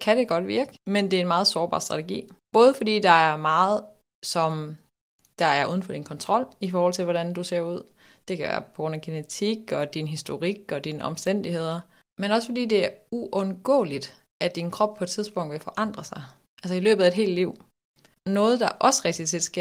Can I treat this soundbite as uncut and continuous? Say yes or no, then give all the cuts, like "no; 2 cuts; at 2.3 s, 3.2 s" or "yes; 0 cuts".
yes; 0 cuts